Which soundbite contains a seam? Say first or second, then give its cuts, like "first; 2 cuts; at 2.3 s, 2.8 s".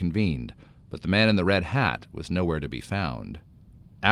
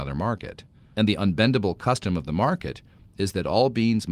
second; 1 cut; at 0.9 s